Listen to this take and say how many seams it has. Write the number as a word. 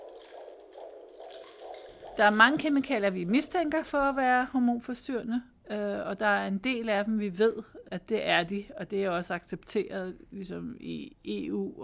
one